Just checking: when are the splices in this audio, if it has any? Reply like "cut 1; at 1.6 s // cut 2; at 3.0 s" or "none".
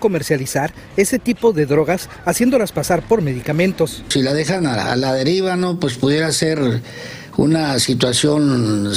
none